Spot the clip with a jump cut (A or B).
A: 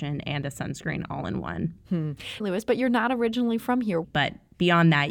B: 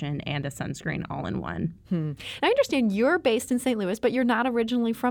A